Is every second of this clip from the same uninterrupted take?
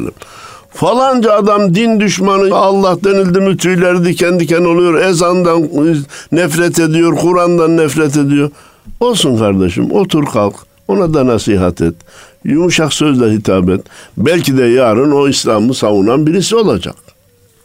no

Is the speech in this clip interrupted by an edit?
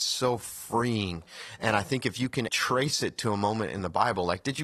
yes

